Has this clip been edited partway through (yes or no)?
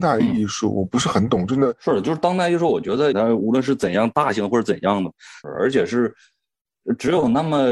yes